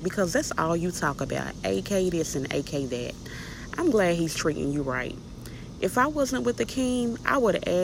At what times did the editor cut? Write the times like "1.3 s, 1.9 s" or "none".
none